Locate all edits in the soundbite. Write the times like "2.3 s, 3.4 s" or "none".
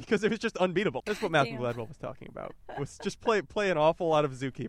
1.0 s